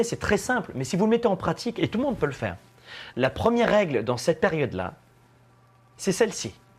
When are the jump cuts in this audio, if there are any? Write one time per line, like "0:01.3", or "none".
0:03.1